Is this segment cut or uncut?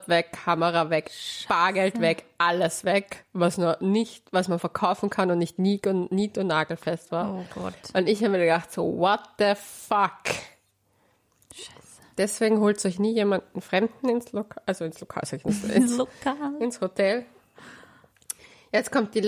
uncut